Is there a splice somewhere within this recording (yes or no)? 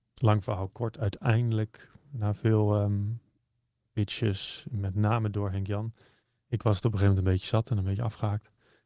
no